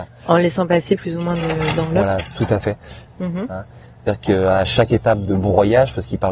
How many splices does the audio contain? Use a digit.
2